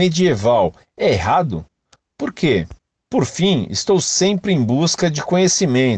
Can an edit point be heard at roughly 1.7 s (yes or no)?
no